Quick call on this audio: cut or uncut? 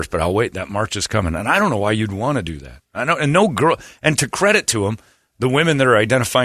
uncut